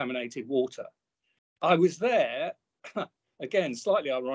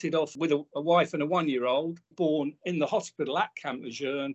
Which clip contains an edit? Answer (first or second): second